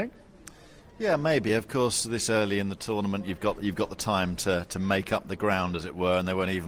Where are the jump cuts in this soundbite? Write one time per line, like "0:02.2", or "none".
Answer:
none